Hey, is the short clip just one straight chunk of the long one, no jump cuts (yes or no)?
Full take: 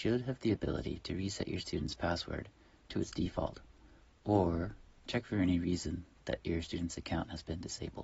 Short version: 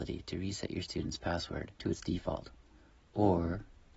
no